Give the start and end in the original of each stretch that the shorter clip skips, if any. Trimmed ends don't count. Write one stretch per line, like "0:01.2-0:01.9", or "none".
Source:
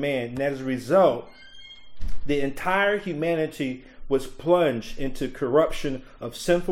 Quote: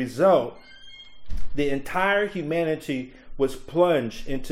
none